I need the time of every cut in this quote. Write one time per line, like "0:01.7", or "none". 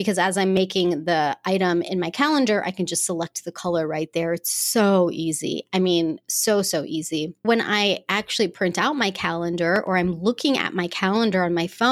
0:07.4